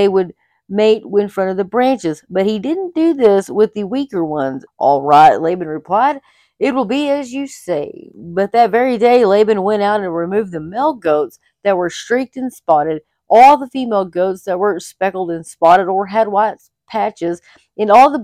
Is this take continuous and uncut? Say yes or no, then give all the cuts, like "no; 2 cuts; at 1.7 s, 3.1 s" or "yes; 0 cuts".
no; 1 cut; at 4.7 s